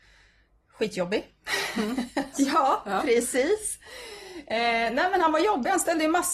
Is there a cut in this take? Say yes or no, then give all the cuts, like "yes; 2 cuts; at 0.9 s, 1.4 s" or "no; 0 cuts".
yes; 1 cut; at 2.3 s